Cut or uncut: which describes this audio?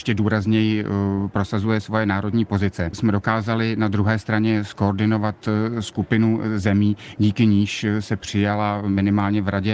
cut